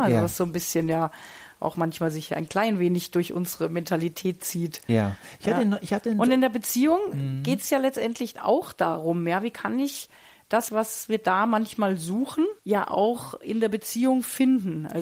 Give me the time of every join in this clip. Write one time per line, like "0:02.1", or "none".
0:10.7
0:12.6